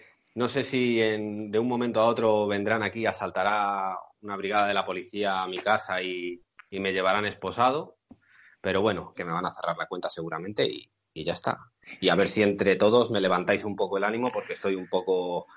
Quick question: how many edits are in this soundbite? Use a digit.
1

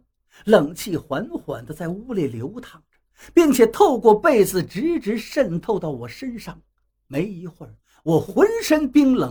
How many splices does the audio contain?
0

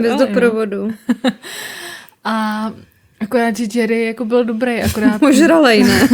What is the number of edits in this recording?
0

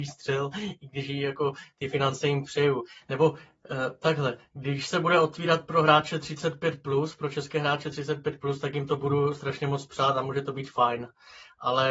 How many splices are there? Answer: 1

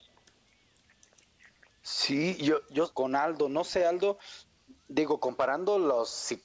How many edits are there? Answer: 1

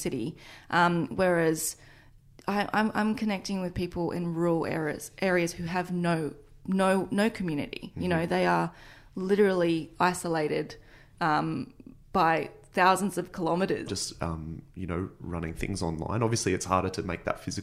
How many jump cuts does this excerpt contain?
1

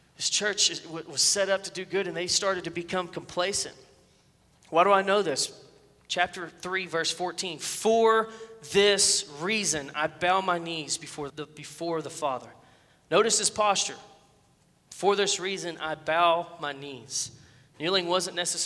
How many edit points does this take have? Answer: 1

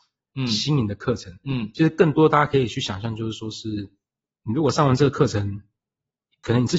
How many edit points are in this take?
0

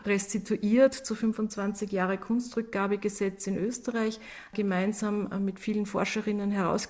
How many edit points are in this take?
0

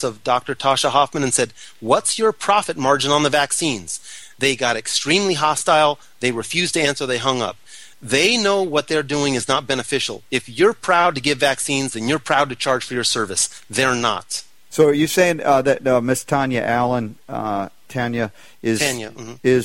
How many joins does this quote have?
2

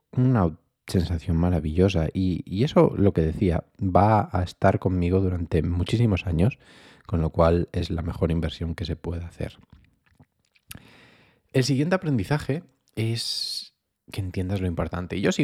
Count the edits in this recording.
0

